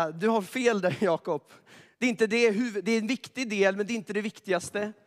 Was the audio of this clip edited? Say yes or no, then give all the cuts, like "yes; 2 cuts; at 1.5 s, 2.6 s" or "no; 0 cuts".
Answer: no; 0 cuts